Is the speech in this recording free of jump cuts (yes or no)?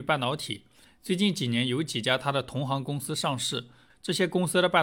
no